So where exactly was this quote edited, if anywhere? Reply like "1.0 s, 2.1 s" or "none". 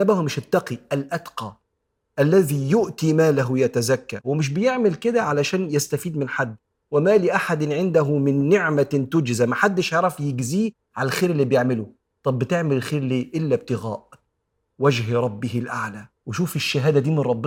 16.2 s

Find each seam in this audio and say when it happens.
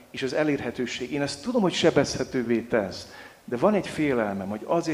none

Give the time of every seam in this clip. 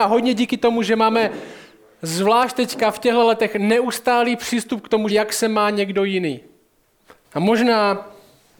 5.1 s, 7.2 s

